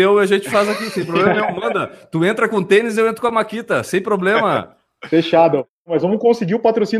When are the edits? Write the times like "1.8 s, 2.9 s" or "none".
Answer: none